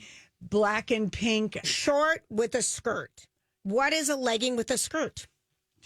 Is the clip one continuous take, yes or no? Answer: no